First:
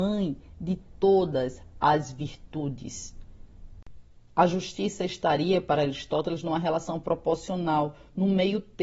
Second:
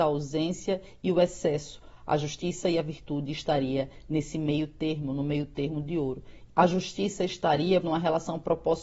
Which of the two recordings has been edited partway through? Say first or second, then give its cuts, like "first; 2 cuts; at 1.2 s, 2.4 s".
second; 2 cuts; at 6.5 s, 7.8 s